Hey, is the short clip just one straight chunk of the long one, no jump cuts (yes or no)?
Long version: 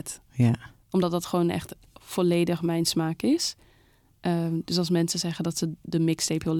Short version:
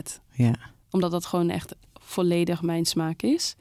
yes